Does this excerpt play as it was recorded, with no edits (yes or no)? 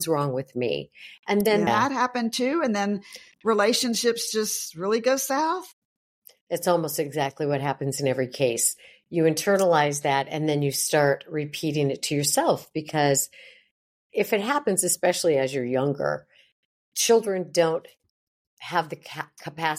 no